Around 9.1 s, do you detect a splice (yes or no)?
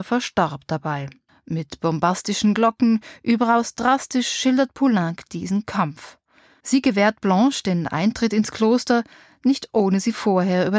no